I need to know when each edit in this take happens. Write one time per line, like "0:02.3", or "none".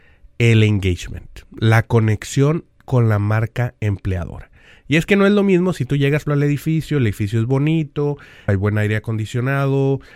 0:06.3
0:08.5